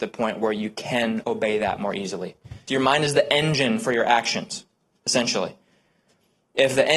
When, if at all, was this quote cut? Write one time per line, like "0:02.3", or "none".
0:01.2
0:02.7